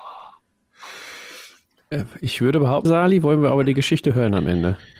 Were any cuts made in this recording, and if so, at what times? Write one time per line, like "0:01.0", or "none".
0:02.9